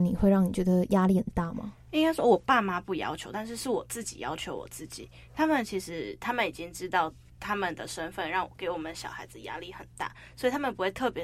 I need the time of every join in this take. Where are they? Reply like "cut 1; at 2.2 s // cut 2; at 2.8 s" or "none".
none